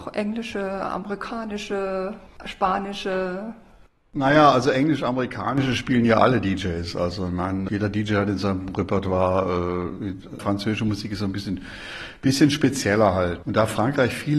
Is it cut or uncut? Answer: cut